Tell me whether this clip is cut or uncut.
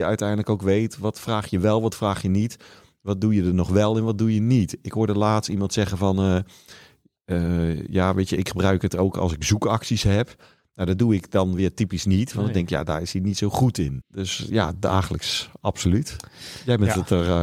cut